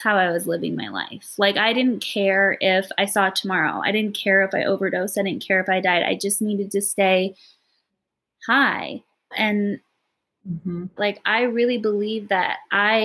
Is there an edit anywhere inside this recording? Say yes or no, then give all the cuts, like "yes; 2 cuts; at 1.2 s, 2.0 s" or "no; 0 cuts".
yes; 2 cuts; at 9.3 s, 11.0 s